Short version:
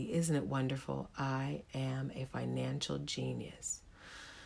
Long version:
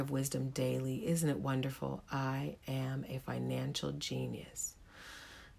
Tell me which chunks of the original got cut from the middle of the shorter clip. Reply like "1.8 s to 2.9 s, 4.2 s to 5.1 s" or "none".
none